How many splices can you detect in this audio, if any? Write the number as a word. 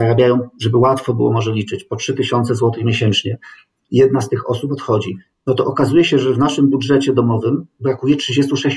zero